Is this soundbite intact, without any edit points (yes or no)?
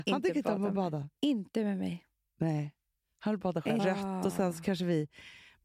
no